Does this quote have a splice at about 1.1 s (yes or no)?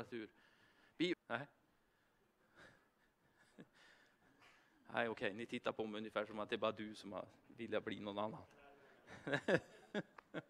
yes